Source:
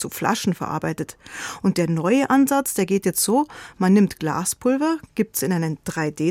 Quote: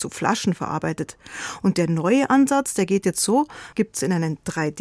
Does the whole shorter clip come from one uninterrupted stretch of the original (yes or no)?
no